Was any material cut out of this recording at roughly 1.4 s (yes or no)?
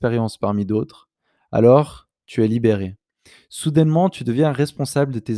no